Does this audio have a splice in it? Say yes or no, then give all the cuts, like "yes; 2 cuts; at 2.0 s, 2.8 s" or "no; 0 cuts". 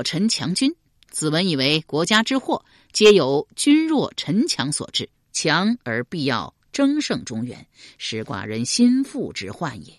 yes; 1 cut; at 5.2 s